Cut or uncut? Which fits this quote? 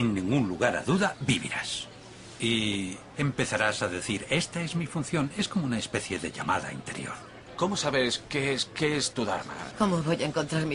cut